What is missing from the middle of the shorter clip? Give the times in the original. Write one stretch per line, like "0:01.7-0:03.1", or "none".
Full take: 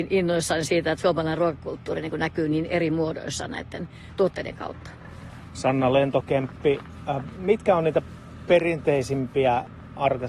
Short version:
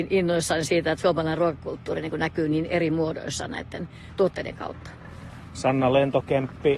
none